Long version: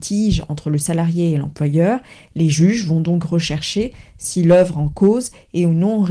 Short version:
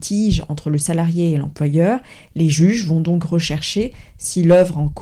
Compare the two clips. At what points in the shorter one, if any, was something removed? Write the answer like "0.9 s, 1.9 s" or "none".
none